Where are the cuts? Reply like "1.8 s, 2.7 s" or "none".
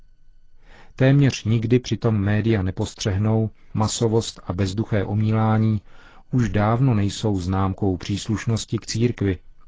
3.7 s